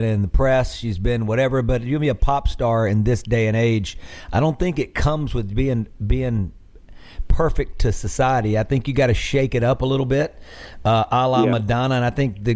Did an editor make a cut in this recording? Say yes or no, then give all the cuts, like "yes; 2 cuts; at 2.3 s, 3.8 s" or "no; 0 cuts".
no; 0 cuts